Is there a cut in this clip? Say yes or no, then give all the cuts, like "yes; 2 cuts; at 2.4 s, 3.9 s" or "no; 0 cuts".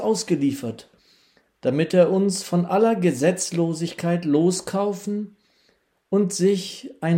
no; 0 cuts